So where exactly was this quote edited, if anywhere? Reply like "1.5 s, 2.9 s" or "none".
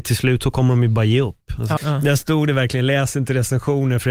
1.8 s